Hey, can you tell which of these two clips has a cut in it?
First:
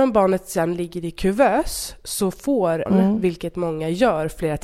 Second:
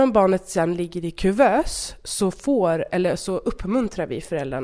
first; 1 cut; at 2.9 s

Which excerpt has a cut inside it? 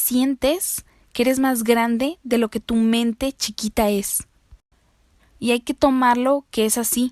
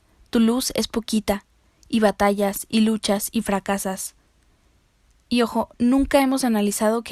first; 1 cut; at 5.2 s

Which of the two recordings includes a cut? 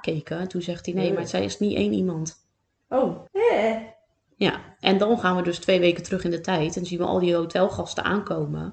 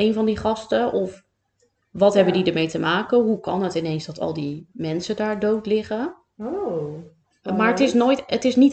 first; 1 cut; at 3.3 s

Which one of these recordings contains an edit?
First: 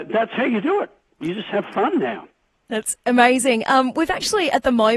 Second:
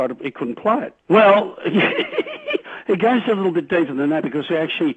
second; 1 cut; at 1.0 s

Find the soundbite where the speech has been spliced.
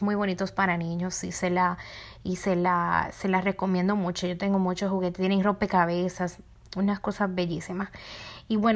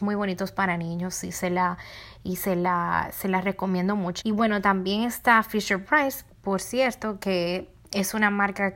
second; 2 cuts; at 4.2 s, 6.3 s

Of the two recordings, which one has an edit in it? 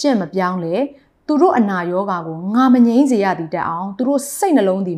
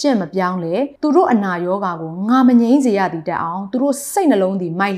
second; 1 cut; at 1.0 s

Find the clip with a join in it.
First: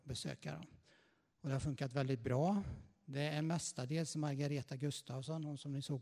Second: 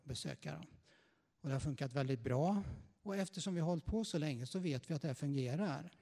second; 1 cut; at 3.0 s

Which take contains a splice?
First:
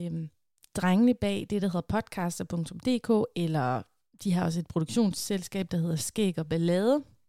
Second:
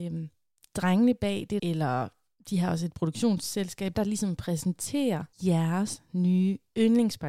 second; 3 cuts; at 1.6 s, 4.0 s, 5.3 s

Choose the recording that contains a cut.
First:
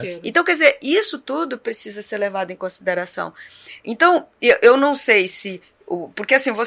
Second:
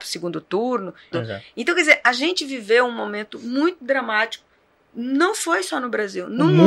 second; 1 cut; at 1.1 s

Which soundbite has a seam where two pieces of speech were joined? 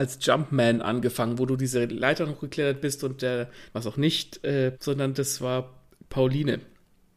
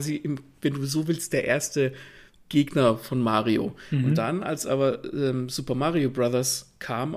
first; 2 cuts; at 3.7 s, 4.7 s

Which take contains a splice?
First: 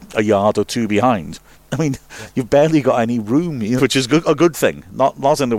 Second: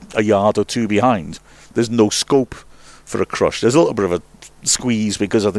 first; 2 cuts; at 1.5 s, 3.8 s

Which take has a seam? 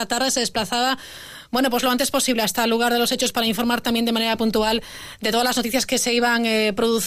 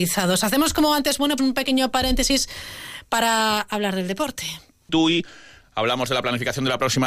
second; 2 cuts; at 1.4 s, 4.9 s

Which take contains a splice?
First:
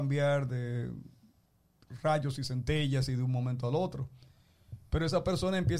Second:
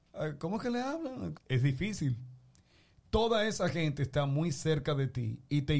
second; 1 cut; at 1.3 s

